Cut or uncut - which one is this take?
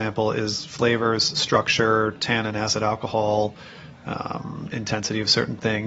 uncut